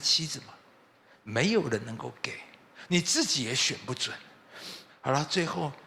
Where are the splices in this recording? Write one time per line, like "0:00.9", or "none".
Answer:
0:04.9